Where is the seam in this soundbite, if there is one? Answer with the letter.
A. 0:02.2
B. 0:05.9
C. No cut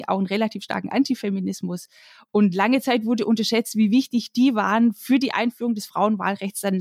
C